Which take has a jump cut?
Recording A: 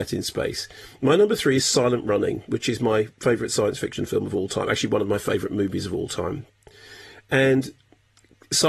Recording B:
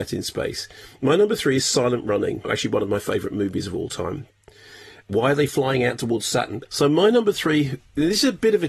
B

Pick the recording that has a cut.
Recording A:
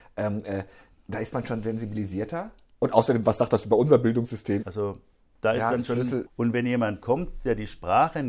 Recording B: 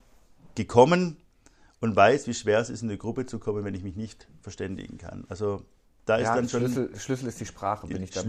A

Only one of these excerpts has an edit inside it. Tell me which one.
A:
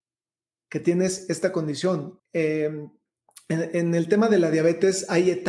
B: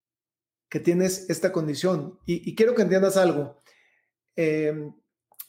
A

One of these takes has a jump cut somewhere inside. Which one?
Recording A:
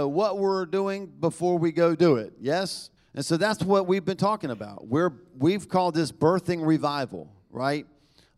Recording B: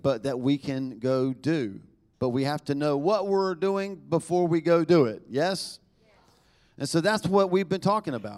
A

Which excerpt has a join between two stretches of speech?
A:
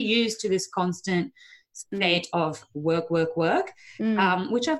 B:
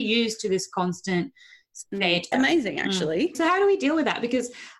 B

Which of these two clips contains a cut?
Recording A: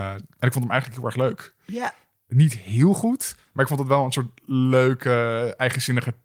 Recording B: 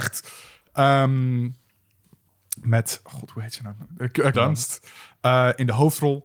B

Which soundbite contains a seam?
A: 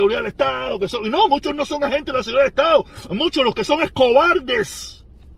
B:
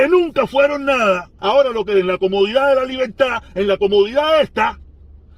B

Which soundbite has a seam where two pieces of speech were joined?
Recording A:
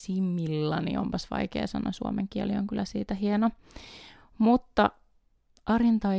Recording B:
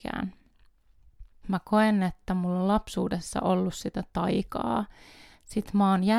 B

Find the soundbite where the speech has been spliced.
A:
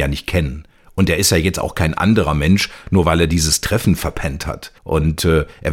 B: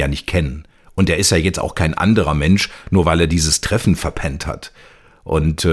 A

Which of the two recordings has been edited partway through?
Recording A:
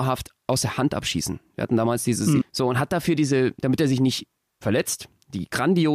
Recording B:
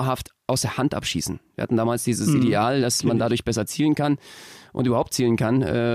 A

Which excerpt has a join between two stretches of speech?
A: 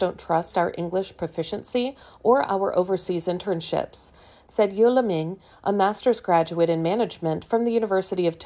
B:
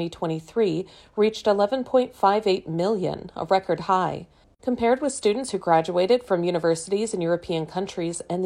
B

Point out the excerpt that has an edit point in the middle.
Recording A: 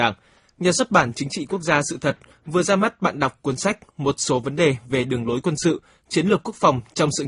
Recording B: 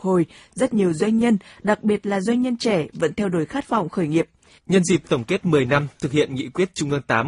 B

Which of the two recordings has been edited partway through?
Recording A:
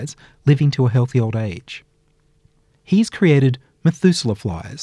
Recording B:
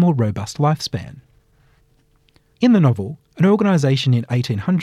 B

